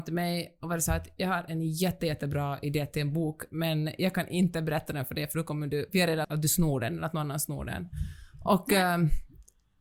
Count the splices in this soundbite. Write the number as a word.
one